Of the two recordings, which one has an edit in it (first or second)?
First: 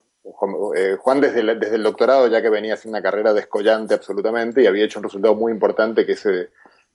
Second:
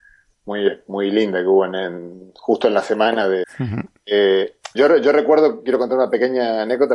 second